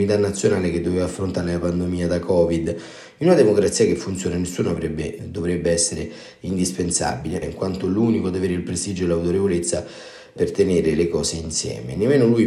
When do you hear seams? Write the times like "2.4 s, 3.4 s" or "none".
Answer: 5.2 s, 7.4 s